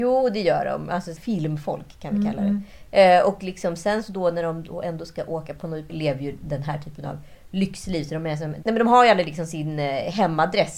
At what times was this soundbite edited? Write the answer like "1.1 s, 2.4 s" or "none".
1.2 s, 5.9 s

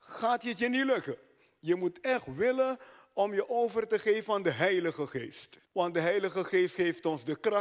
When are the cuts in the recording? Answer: 5.7 s

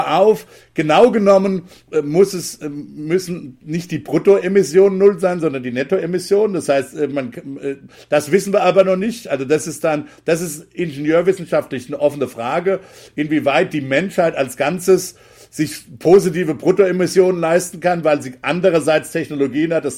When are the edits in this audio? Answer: none

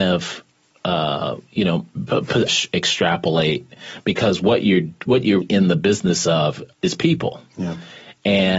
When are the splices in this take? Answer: 2.5 s, 5.4 s, 6.7 s

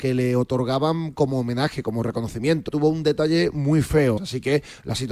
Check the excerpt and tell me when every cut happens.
2.7 s, 4.2 s

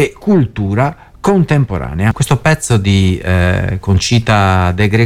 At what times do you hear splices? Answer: 2.1 s

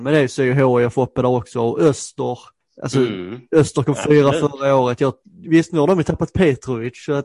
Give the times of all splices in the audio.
none

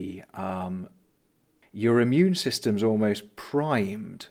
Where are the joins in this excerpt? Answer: 1.6 s

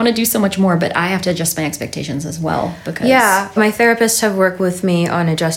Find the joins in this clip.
3.6 s

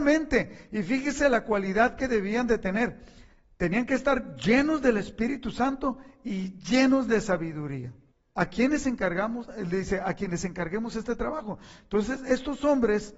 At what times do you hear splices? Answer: none

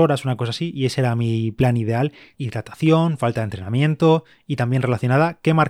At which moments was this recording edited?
2.3 s

